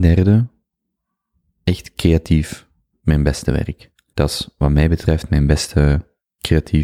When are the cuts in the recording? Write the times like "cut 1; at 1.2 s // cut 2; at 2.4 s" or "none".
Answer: cut 1; at 4.1 s